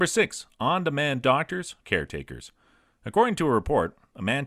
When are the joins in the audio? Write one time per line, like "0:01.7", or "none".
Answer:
0:01.8